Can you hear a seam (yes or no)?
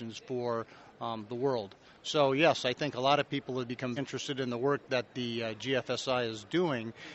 yes